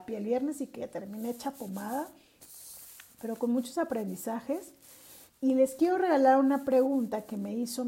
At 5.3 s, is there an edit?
yes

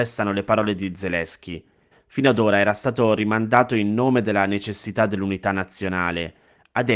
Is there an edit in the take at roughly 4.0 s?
no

